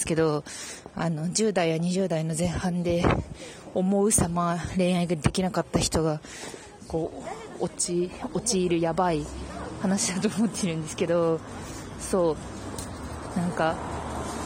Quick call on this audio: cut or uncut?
uncut